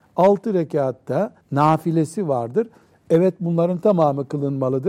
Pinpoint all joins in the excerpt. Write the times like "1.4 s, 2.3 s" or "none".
1.4 s